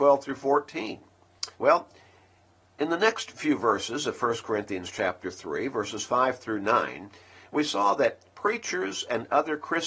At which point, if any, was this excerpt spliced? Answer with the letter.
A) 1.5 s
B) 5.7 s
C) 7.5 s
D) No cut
A